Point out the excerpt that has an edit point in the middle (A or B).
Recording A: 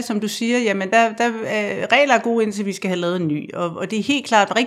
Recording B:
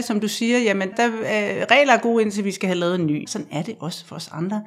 B